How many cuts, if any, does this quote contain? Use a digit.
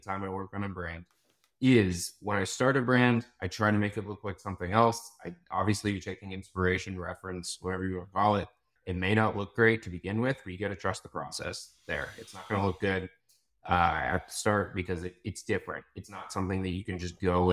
1